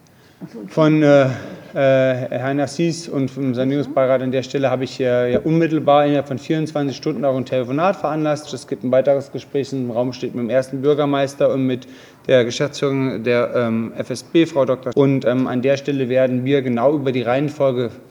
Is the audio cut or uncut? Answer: cut